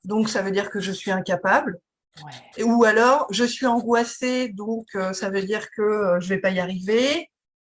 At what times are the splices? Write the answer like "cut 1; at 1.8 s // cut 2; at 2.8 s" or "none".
none